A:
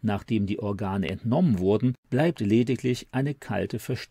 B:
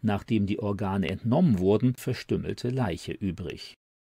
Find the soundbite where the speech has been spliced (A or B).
B